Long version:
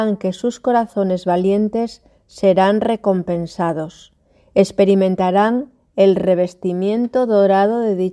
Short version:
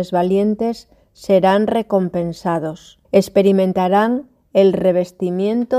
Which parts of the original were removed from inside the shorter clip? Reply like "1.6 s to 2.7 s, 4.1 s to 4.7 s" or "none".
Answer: 4.2 s to 4.5 s